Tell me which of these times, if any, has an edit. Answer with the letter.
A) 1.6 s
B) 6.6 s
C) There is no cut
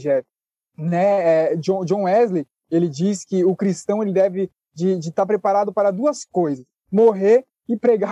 C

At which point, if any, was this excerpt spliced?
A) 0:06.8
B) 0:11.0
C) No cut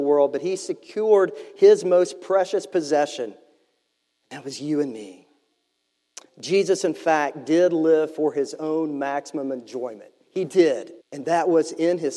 B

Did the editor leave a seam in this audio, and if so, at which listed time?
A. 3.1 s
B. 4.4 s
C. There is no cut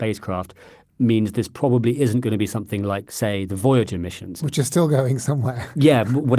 C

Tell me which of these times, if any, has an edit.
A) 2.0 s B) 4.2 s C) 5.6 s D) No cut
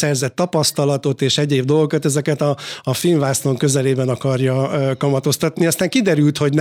D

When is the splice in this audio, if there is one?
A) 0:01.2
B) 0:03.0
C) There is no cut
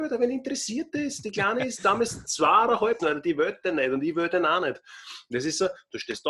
B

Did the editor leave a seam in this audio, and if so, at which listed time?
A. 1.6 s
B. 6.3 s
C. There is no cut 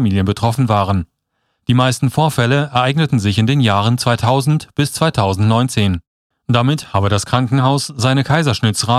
B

